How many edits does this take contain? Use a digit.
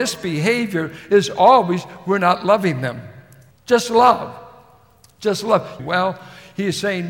2